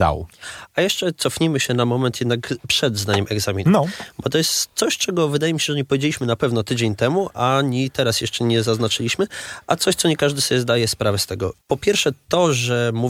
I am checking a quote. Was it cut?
no; 0 cuts

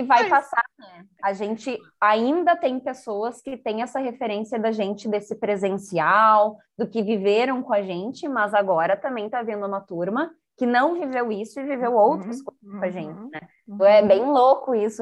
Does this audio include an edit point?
yes; 1 cut; at 13.8 s

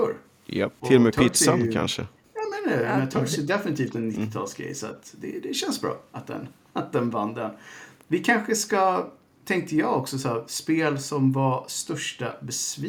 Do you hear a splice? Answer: no; 0 cuts

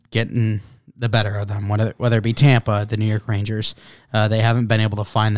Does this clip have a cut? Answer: no; 0 cuts

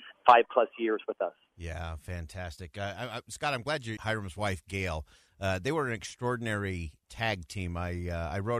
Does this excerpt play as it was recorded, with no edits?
no; 1 cut; at 4.0 s

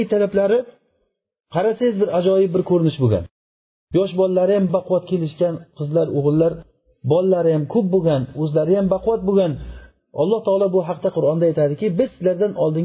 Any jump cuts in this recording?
yes; 1 cut; at 4.7 s

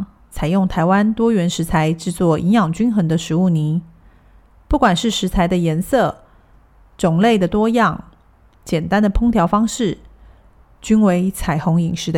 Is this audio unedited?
yes; 0 cuts

